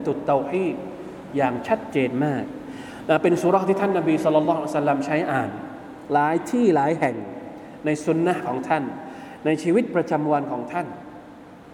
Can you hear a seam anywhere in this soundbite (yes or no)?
no